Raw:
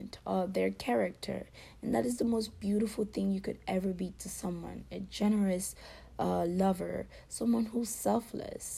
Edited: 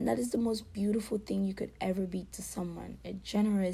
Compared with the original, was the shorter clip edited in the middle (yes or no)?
no